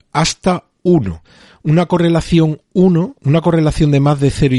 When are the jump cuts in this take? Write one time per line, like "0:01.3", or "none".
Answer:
none